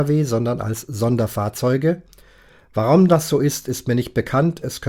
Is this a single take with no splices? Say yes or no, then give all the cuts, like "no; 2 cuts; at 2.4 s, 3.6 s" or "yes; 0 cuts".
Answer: yes; 0 cuts